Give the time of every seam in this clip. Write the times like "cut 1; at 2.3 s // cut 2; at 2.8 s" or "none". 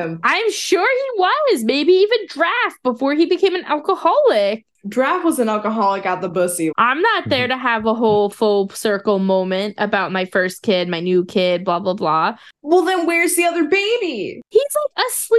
cut 1; at 6.7 s